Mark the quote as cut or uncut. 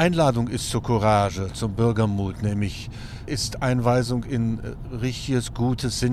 cut